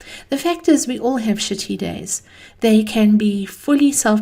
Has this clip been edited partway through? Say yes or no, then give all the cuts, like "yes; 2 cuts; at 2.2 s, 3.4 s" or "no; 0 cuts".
no; 0 cuts